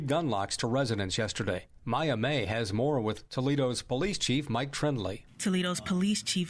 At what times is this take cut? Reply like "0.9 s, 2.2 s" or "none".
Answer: 5.3 s

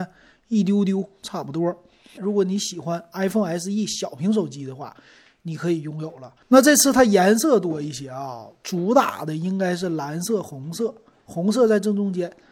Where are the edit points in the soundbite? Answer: 2.2 s, 6.4 s

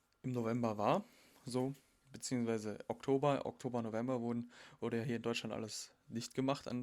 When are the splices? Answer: none

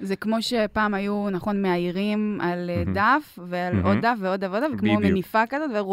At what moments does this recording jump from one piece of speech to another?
4.7 s

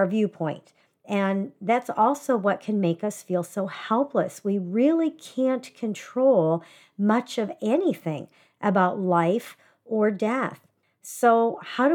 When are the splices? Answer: none

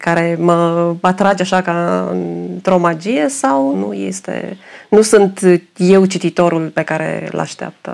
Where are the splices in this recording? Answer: 3.7 s

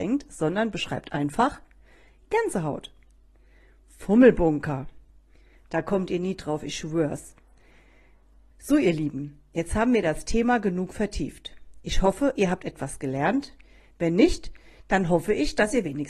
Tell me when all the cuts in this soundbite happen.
5.5 s, 8.5 s

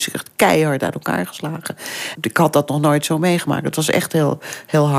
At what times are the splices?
none

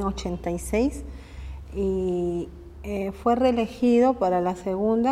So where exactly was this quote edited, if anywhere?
none

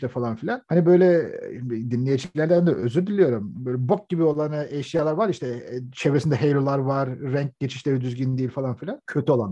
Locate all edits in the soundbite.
none

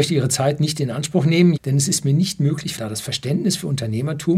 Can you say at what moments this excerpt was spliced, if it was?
1.6 s, 2.8 s

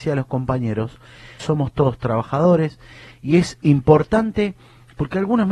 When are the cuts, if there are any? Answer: 1.4 s

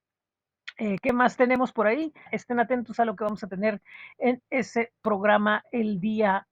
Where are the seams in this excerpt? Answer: 2.3 s

